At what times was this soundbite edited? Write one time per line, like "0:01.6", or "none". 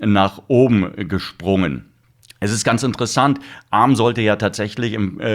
none